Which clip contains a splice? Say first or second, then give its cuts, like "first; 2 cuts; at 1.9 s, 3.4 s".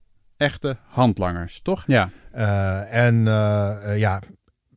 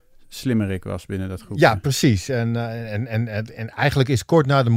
first; 1 cut; at 1.8 s